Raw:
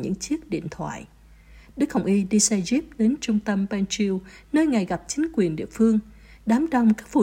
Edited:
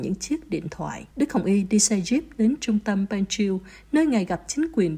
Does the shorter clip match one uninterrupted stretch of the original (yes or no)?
no